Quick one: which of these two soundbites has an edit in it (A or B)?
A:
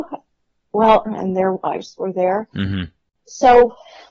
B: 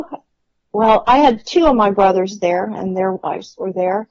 A